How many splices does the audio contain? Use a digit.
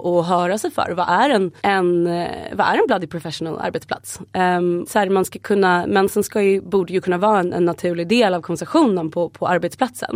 2